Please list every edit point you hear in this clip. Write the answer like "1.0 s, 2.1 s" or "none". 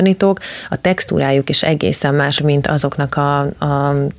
2.4 s